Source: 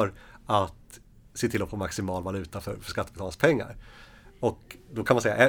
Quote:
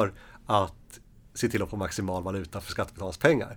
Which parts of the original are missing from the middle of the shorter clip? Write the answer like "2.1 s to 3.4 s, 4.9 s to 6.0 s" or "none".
2.6 s to 2.8 s